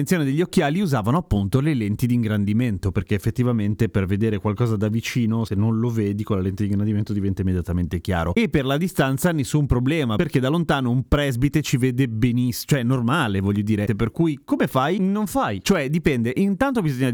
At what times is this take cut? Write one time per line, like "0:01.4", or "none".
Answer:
0:13.9

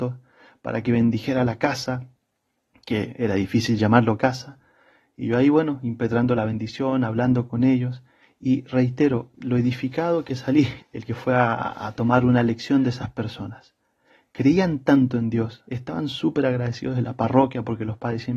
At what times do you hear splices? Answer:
0:10.8
0:15.7

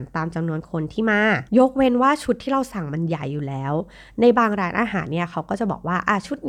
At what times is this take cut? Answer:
0:01.5

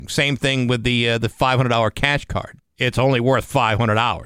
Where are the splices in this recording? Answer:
0:02.6

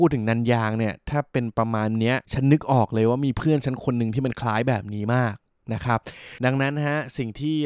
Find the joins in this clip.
0:02.2

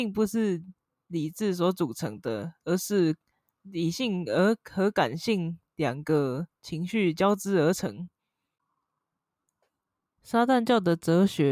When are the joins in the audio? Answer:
none

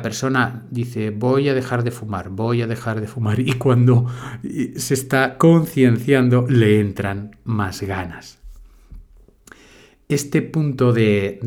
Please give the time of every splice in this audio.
none

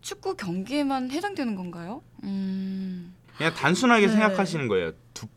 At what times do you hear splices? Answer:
0:02.1
0:03.3

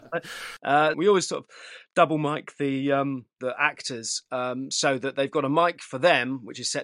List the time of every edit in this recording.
0:00.9

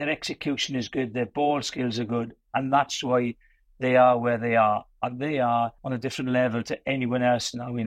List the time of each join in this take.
none

